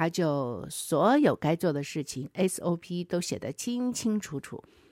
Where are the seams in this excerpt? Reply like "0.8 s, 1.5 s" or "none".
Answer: none